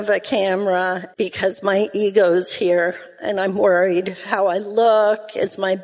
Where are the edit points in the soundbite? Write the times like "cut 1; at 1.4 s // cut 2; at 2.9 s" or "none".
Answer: cut 1; at 1.1 s